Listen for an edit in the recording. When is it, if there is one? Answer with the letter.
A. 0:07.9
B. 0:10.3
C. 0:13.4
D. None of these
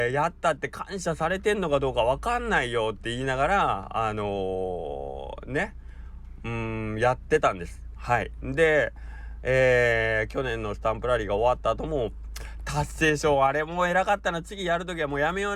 D